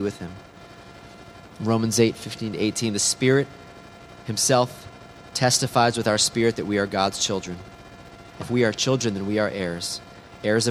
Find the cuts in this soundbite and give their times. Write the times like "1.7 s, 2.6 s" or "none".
8.4 s